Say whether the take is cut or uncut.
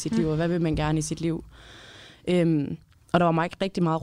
uncut